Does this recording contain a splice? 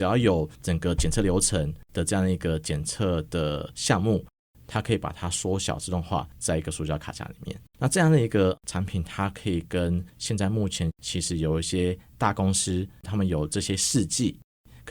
yes; 2 cuts; at 7.7 s, 13.0 s

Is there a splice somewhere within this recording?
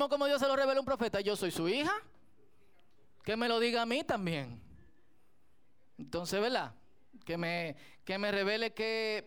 no; 0 cuts

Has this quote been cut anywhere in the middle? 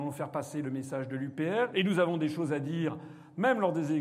yes; 1 cut; at 1.7 s

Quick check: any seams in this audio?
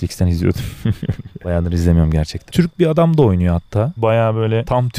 yes; 2 cuts; at 2.5 s, 4.0 s

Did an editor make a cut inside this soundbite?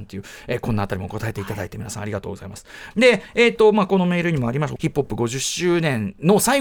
yes; 2 cuts; at 2.9 s, 4.8 s

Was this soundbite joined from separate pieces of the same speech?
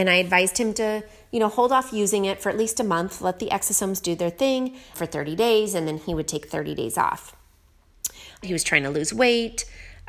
yes; 2 cuts; at 4.9 s, 8.4 s

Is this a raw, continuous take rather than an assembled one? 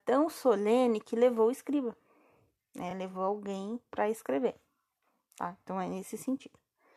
yes; 0 cuts

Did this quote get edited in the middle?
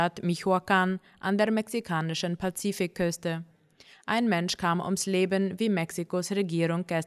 no; 0 cuts

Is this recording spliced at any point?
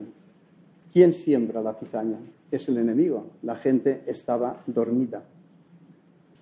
no; 0 cuts

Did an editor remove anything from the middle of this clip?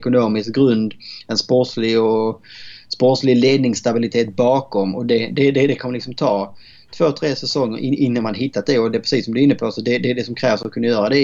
no; 0 cuts

